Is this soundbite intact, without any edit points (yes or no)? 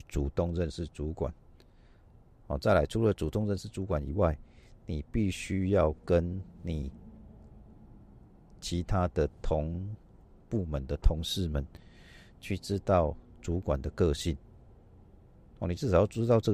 yes